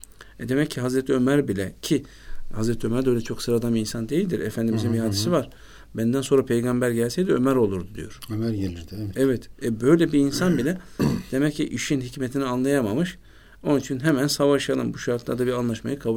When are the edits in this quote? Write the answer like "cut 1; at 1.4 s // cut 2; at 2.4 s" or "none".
none